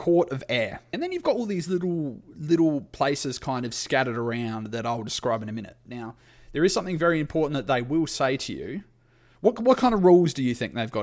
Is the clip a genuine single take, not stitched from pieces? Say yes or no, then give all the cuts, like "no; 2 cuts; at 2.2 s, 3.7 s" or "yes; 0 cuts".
yes; 0 cuts